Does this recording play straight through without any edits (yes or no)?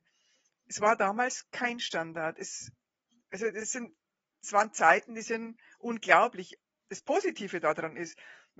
yes